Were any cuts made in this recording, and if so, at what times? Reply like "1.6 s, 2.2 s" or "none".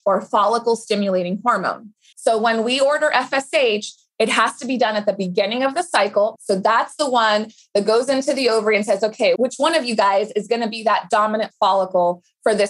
2.1 s, 6.4 s, 9.4 s